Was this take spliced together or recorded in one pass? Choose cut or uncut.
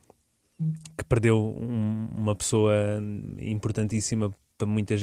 uncut